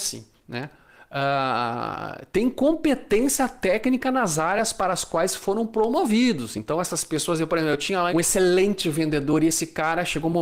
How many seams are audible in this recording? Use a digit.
1